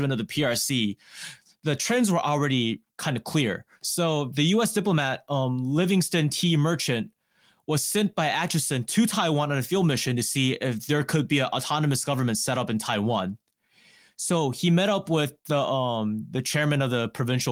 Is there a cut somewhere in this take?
no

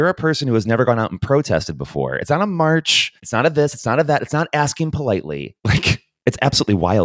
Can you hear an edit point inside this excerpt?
yes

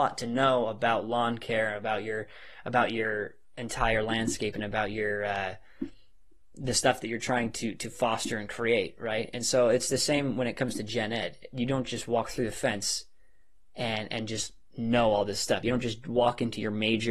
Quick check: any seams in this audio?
no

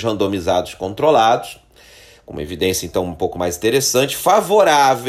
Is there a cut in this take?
no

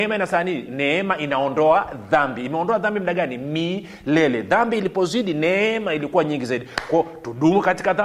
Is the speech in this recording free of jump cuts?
yes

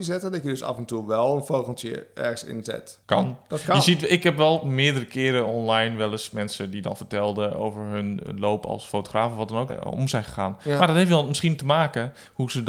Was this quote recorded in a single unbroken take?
no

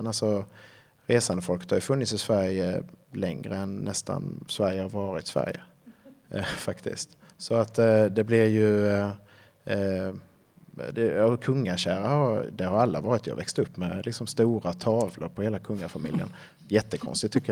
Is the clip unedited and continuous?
yes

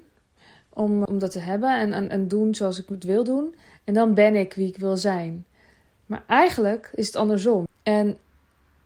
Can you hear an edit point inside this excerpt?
yes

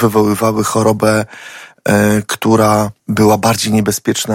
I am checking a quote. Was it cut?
yes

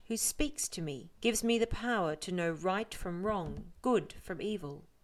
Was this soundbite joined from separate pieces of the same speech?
yes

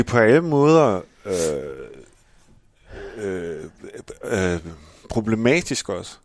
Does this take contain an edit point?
no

